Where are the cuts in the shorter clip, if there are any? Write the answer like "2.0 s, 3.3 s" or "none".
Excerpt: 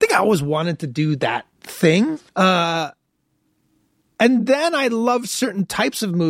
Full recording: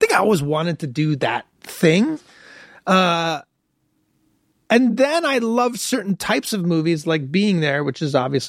2.3 s